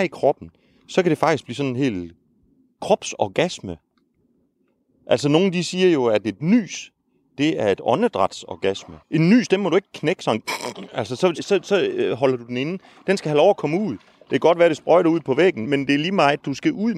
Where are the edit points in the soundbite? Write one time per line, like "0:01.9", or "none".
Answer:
0:09.0
0:11.4
0:15.6